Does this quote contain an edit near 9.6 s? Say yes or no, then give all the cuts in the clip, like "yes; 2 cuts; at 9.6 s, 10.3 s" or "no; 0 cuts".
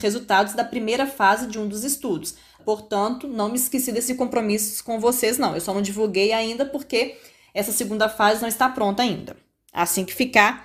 no; 1 cut; at 2.6 s